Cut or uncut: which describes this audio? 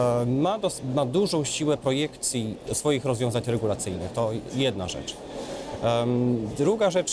uncut